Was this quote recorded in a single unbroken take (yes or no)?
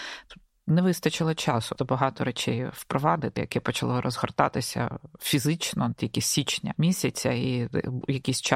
no